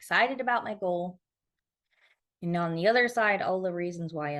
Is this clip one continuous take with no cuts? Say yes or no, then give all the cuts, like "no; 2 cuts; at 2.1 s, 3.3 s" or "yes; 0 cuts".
yes; 0 cuts